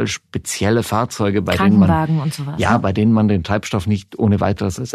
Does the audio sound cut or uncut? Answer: uncut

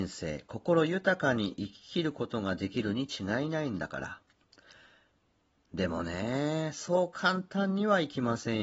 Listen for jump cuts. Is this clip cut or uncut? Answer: uncut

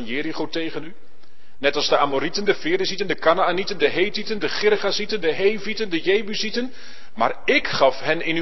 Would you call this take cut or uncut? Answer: uncut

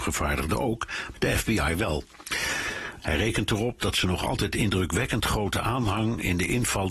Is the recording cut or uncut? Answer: cut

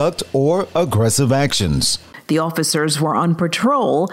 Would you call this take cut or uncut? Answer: cut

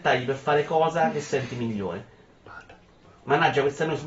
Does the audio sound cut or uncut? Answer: uncut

